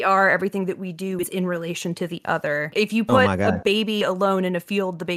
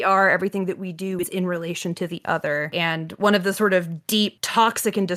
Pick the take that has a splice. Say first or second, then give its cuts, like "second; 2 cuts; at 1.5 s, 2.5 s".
first; 1 cut; at 2.7 s